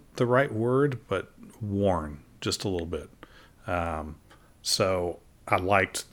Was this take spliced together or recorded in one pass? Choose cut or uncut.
uncut